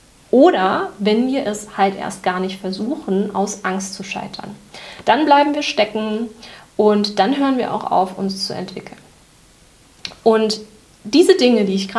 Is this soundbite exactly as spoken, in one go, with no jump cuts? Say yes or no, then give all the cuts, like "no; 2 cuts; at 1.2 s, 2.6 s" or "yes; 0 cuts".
yes; 0 cuts